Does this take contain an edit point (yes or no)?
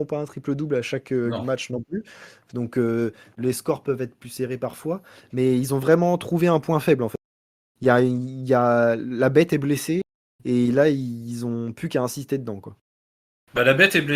no